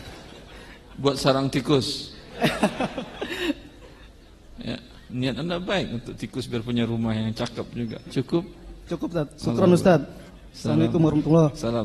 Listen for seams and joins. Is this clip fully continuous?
no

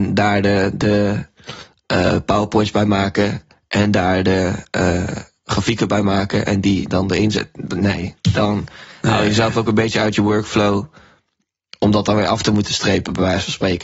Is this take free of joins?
yes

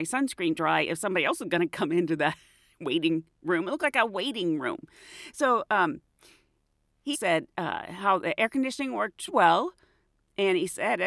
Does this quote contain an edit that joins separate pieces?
yes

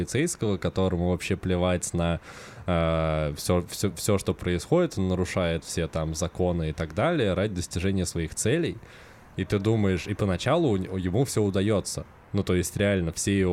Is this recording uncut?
yes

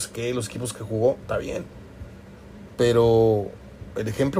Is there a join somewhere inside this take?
yes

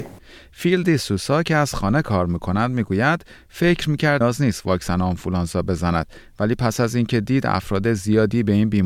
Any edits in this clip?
yes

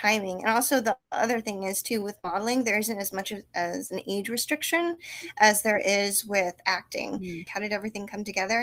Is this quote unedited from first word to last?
no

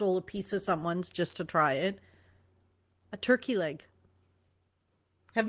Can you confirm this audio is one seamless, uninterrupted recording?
yes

